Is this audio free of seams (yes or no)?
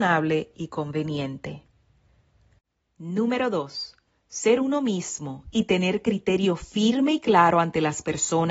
yes